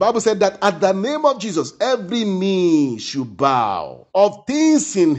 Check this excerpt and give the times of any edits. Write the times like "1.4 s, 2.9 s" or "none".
4.1 s